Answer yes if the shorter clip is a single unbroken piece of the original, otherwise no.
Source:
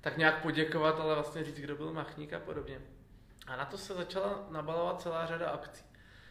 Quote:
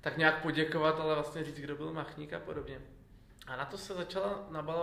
yes